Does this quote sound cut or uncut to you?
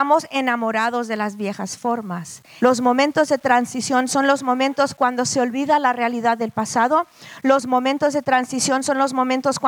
cut